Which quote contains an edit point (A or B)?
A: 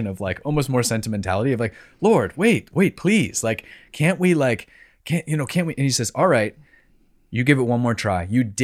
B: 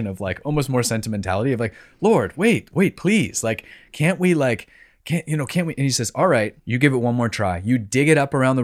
B